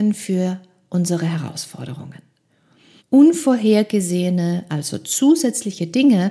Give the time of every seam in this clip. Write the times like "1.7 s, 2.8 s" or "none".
3.0 s